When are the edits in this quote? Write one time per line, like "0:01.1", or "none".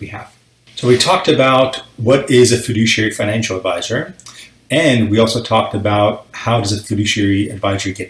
0:04.6

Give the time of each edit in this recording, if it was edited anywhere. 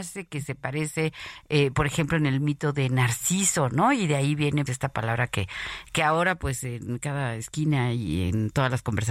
0:04.7

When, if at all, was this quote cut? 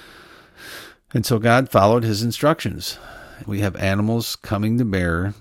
0:03.4

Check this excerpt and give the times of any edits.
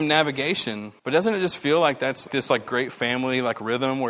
0:01.0
0:02.3

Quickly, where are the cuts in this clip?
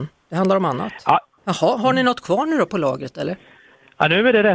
0:01.4

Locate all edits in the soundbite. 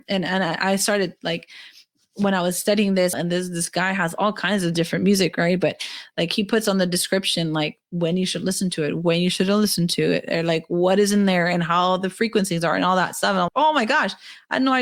0:03.1
0:13.5

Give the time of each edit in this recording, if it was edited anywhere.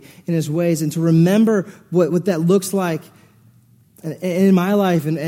none

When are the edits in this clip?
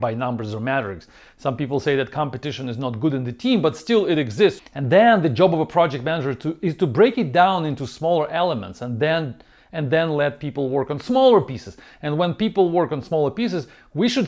0:04.6

